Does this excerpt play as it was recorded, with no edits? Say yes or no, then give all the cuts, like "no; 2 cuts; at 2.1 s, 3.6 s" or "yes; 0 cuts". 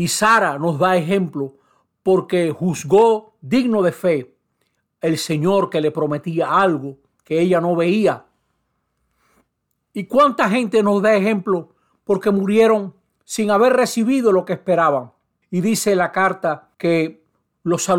no; 2 cuts; at 15.4 s, 16.7 s